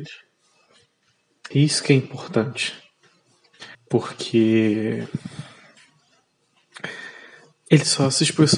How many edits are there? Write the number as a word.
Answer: two